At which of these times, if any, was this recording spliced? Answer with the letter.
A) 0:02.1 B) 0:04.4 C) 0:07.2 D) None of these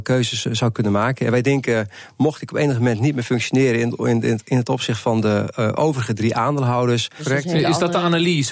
C